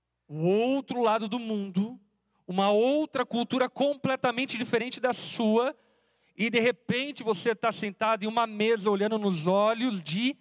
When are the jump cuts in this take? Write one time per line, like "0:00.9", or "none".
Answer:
none